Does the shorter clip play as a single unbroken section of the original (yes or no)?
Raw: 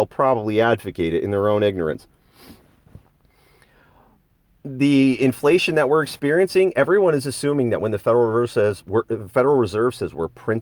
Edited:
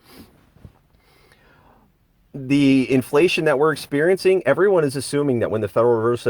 yes